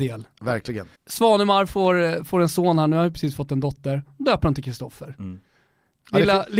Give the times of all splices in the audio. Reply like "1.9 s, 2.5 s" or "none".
1.0 s